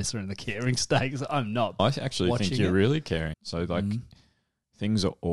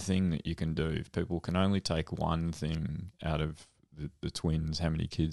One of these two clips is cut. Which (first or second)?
first